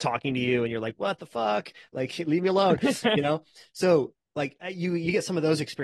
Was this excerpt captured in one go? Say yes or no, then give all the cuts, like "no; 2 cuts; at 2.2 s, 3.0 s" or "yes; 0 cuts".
yes; 0 cuts